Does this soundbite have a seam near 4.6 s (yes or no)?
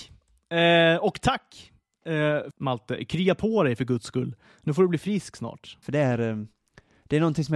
no